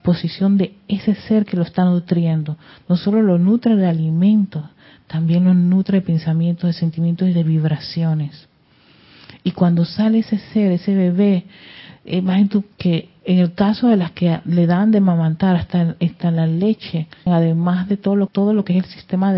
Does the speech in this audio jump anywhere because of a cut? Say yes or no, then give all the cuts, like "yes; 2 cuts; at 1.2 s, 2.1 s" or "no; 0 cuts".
yes; 3 cuts; at 12.7 s, 17.3 s, 18.3 s